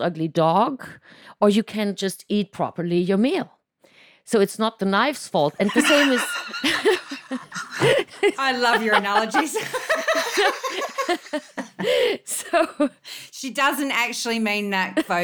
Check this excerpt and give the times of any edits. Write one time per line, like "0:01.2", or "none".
0:08.4